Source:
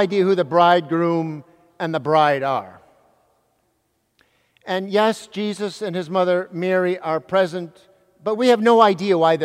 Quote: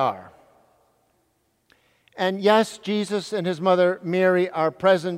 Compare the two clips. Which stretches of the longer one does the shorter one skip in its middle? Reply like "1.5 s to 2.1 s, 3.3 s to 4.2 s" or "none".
none